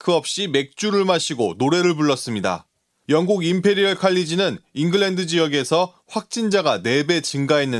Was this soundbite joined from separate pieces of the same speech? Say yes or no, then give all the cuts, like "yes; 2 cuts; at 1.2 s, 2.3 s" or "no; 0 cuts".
no; 0 cuts